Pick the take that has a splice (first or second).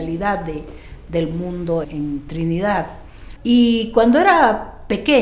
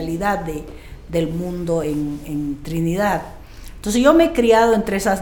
first